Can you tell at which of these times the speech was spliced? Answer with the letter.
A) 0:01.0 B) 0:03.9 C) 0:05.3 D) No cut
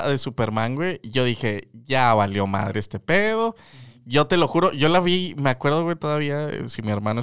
D